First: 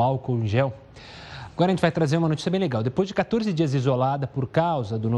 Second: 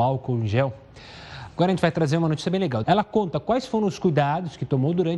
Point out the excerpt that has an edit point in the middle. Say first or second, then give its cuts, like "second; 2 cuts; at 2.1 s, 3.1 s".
second; 1 cut; at 2.8 s